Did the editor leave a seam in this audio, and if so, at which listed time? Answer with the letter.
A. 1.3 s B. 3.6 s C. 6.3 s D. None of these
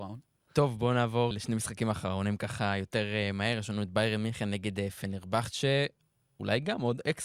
A